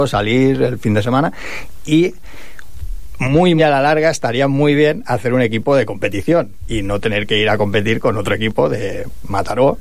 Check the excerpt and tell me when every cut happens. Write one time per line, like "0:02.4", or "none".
0:03.6

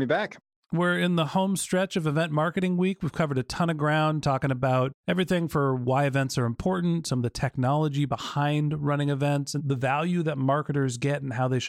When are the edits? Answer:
0:09.6

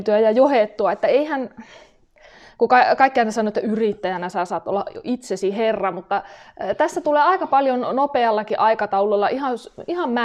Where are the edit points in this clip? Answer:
none

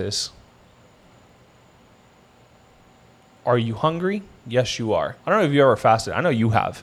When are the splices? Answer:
0:05.2

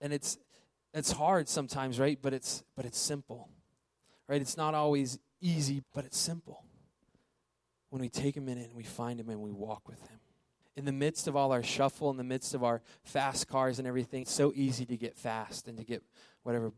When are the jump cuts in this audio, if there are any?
0:05.8
0:10.6
0:14.2

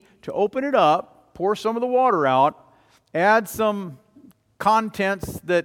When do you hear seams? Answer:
none

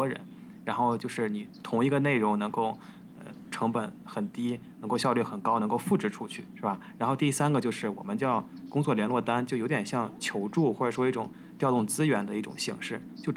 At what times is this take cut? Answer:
0:06.5

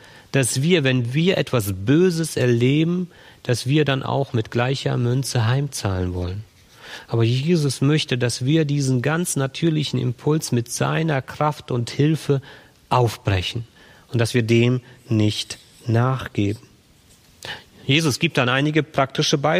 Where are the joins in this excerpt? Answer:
none

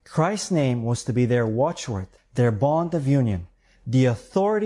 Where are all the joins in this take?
0:02.2

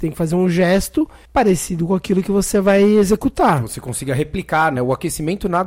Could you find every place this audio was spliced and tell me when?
0:01.3
0:04.8

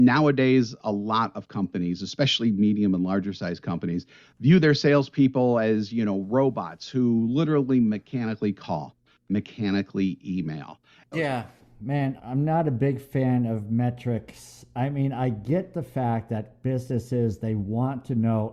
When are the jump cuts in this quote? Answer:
0:11.1
0:12.2

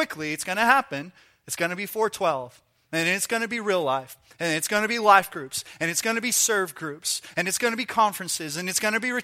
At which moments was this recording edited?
none

